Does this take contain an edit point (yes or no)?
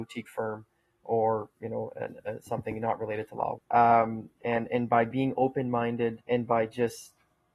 yes